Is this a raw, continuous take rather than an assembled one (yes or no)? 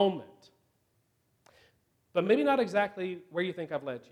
yes